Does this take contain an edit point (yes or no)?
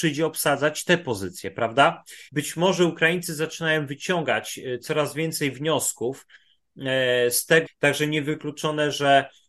yes